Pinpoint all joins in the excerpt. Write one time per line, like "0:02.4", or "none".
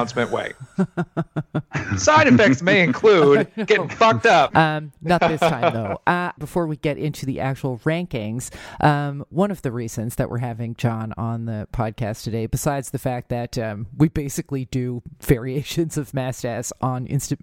0:04.5
0:06.4